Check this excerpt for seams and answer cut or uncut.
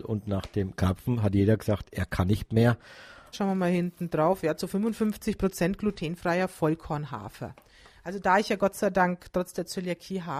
cut